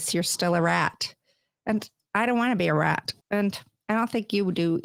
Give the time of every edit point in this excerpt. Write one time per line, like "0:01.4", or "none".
0:03.2